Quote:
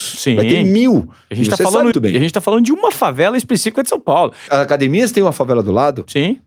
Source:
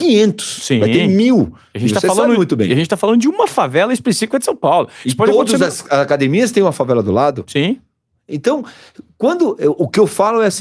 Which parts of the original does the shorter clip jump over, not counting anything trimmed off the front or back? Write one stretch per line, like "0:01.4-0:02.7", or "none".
0:02.4-0:02.5
0:05.0-0:05.9